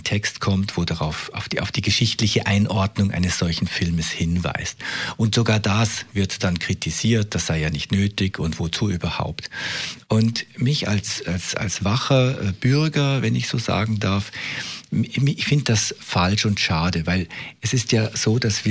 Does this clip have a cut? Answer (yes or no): no